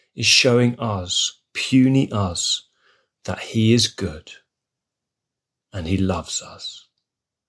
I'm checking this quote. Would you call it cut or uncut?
uncut